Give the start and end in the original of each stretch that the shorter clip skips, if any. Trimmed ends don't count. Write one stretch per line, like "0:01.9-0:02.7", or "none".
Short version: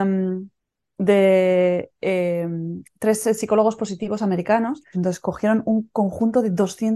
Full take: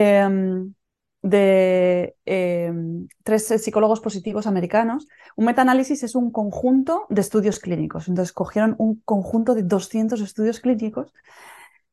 0:05.2-0:08.0

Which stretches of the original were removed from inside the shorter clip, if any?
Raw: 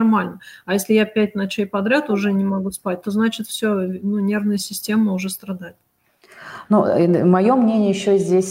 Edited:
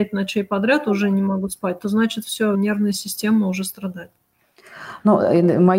0:03.8-0:04.2

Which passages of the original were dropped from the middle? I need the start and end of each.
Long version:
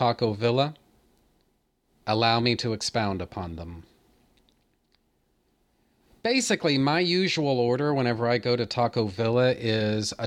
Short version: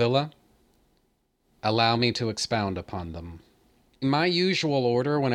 0:04.5-0:06.8

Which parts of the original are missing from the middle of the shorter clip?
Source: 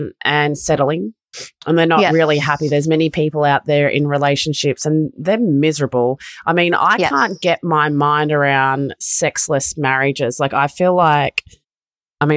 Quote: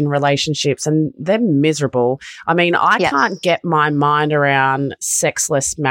none

